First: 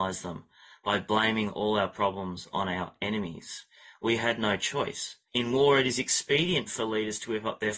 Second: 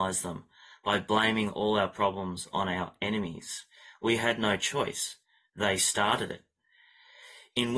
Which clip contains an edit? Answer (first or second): first